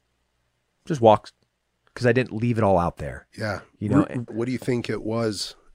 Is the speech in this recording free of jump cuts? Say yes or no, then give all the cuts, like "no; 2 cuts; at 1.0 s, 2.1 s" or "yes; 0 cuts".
no; 1 cut; at 4.3 s